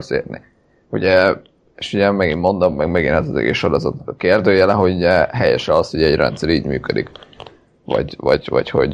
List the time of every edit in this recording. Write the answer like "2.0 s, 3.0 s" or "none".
none